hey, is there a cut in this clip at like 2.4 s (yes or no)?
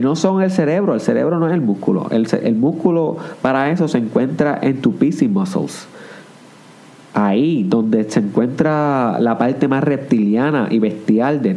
yes